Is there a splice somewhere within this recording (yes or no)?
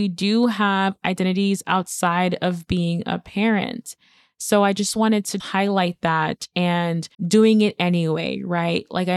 yes